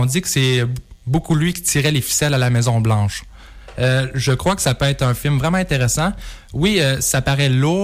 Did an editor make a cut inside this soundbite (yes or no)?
no